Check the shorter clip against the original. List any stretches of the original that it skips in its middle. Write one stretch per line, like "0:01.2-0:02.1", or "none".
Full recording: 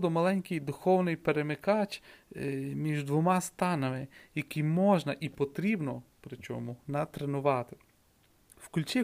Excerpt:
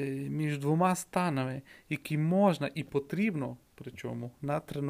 none